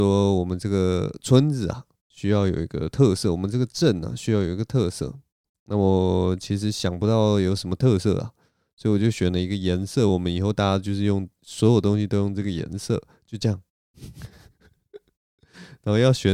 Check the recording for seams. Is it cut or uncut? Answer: uncut